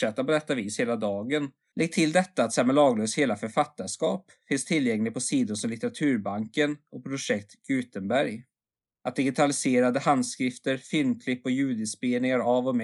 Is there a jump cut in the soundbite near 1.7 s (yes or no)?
yes